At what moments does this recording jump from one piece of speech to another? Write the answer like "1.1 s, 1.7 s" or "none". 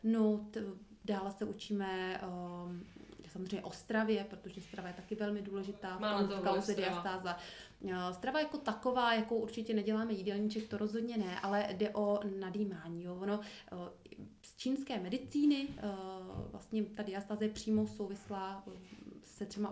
none